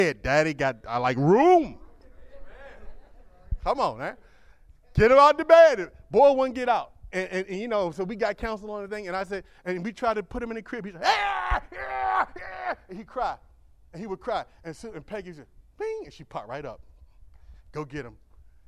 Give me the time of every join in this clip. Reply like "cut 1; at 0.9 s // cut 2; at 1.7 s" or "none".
none